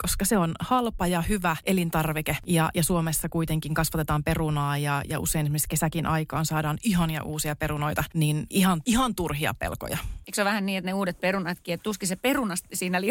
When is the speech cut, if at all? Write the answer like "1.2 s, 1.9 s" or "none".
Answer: none